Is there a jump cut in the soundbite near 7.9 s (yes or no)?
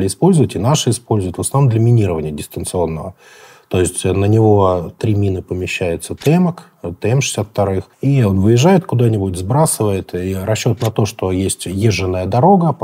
yes